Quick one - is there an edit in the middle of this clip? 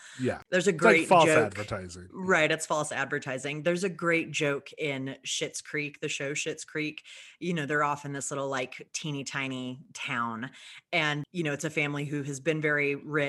no; 0 cuts

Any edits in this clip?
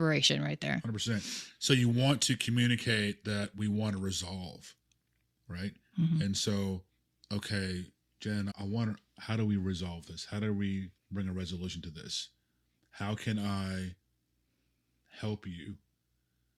yes; 2 cuts; at 8.5 s, 11.0 s

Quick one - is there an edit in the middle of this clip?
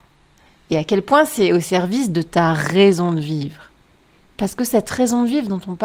no; 0 cuts

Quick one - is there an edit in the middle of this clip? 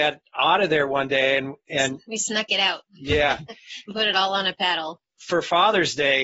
no; 0 cuts

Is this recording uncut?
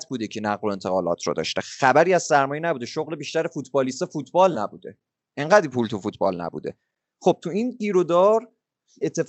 yes; 0 cuts

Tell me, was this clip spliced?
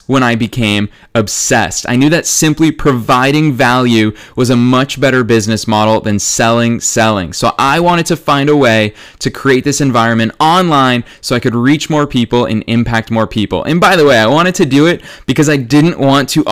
yes; 1 cut; at 6.8 s

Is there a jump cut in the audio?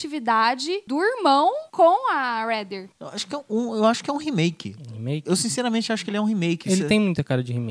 yes; 1 cut; at 2.9 s

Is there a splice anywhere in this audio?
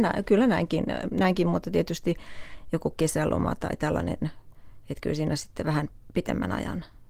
no; 0 cuts

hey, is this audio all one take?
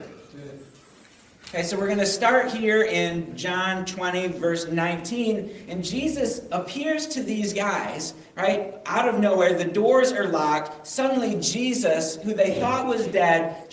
yes; 0 cuts

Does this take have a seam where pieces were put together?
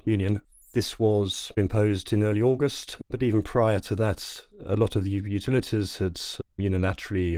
no; 0 cuts

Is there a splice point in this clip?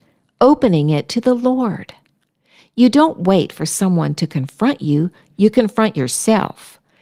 no; 0 cuts

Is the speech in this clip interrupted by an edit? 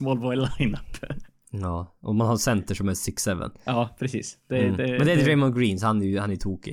no; 0 cuts

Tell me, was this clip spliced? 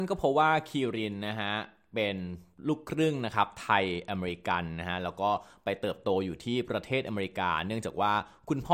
no; 0 cuts

